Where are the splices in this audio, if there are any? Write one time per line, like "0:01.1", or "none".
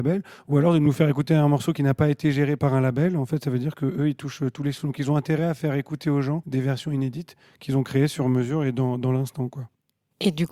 none